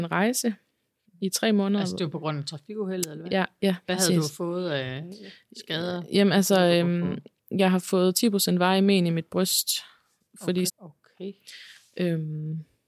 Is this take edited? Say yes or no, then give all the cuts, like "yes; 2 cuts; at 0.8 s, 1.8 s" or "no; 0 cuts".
yes; 1 cut; at 10.7 s